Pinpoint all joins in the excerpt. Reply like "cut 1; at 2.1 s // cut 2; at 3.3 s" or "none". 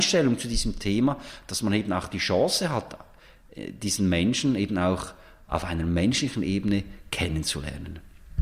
none